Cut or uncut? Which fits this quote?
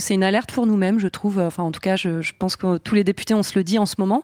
uncut